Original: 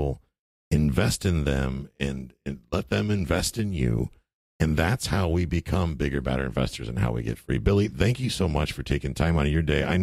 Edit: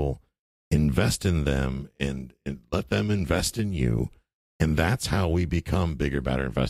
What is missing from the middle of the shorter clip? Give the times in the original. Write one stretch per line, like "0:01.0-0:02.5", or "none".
none